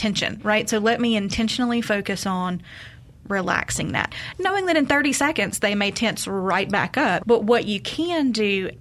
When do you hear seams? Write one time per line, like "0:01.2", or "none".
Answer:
0:07.2